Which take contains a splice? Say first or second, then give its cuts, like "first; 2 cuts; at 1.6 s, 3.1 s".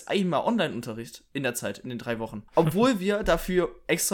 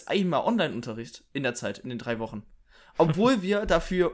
first; 1 cut; at 2.5 s